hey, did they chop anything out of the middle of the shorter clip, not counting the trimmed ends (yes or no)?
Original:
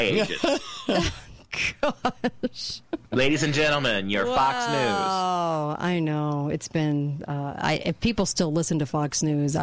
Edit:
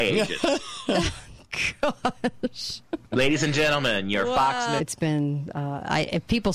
yes